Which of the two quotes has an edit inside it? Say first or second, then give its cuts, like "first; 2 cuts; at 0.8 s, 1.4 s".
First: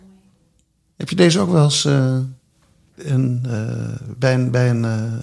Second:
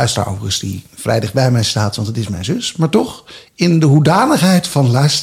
first; 1 cut; at 2.9 s